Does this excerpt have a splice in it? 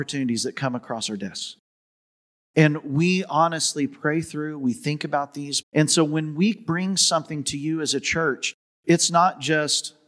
yes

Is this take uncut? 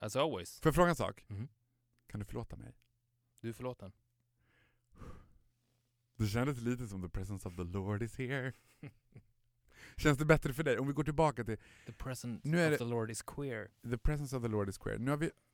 yes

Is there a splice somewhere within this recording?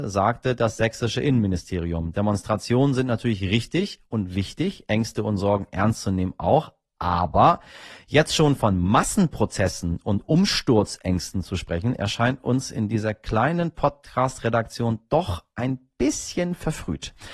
no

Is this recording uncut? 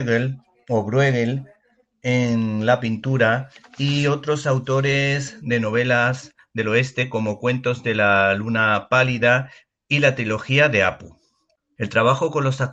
no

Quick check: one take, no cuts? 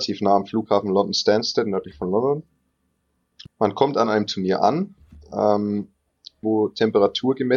no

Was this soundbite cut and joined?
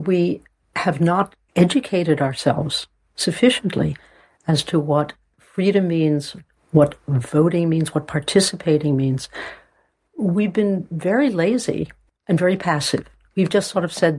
yes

